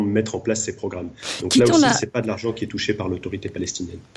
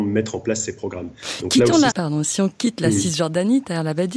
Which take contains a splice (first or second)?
second